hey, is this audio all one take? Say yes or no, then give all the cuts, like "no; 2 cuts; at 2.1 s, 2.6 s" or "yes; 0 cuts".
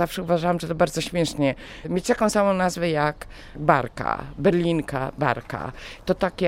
yes; 0 cuts